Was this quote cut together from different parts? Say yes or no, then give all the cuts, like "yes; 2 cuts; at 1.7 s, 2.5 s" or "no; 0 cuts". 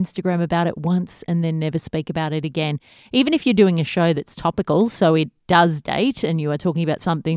no; 0 cuts